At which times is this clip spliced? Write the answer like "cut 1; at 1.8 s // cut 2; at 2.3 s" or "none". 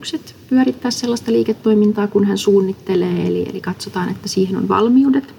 none